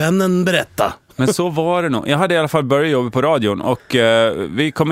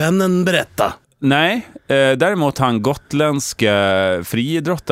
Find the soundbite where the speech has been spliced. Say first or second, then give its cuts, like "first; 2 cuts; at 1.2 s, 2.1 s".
second; 1 cut; at 1.0 s